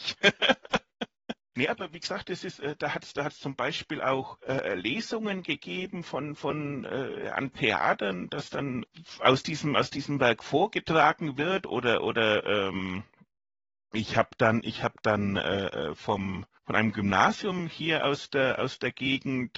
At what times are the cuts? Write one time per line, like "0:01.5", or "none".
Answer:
none

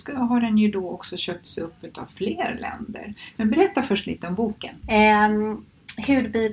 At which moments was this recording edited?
0:04.8

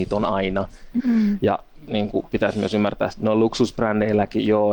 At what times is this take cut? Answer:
0:01.0
0:03.1

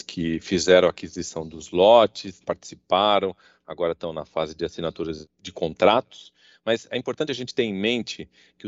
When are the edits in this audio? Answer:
0:02.4
0:05.3

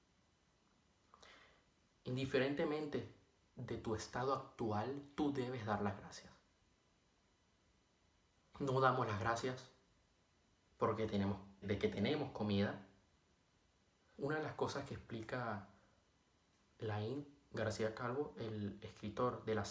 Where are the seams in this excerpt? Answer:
0:08.5
0:11.6
0:14.1

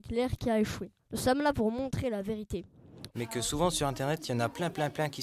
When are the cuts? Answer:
0:01.1
0:03.1

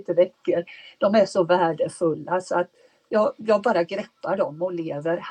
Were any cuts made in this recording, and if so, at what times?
none

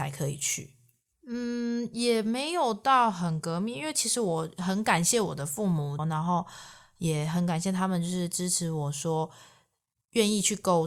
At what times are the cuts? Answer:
0:01.1
0:06.0

